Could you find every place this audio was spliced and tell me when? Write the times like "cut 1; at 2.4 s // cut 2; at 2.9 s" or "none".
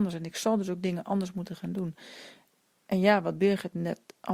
none

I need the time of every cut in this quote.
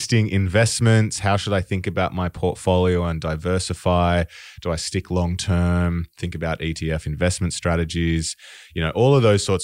none

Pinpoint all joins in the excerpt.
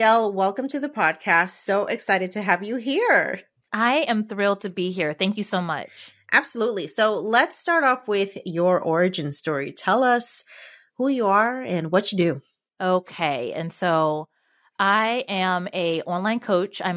none

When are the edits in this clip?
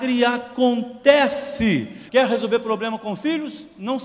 cut 1; at 2.1 s

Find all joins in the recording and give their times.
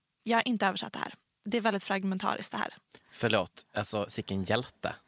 cut 1; at 1.3 s

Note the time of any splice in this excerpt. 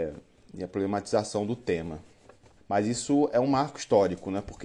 cut 1; at 2.6 s

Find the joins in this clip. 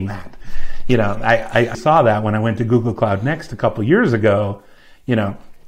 cut 1; at 1.7 s

